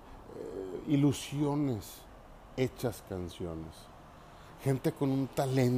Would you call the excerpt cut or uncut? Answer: uncut